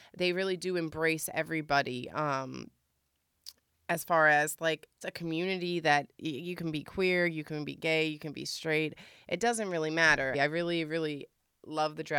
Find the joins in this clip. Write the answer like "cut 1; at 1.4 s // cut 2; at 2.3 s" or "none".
cut 1; at 5.0 s // cut 2; at 10.3 s